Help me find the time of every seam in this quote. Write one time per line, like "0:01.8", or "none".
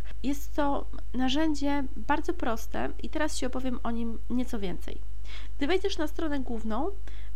none